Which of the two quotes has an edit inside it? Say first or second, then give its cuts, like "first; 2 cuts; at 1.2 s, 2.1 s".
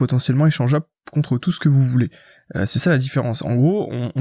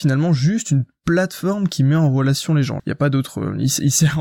second; 1 cut; at 2.8 s